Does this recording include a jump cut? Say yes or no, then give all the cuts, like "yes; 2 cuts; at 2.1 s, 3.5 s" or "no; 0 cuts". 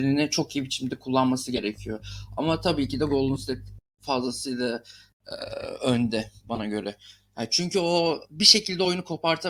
no; 0 cuts